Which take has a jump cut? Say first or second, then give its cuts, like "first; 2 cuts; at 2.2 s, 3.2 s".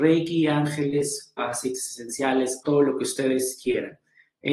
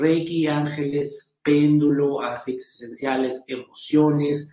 first; 2 cuts; at 1.4 s, 2.6 s